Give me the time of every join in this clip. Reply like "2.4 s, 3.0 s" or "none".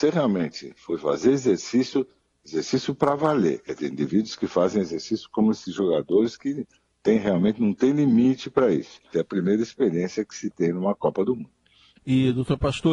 9.1 s